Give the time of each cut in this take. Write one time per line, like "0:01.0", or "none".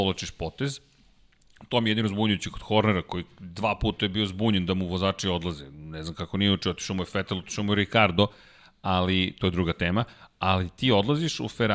none